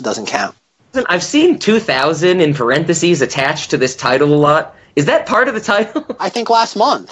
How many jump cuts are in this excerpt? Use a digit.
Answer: 2